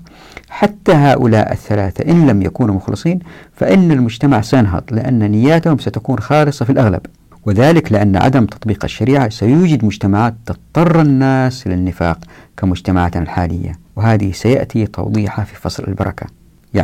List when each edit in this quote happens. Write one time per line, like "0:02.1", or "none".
0:13.9